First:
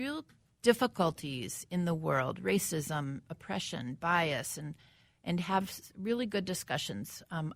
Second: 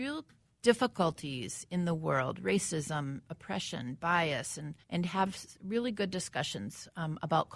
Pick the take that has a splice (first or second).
second